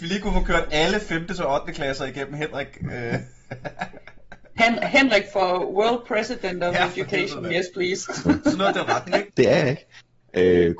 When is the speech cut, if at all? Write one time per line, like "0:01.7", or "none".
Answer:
0:09.3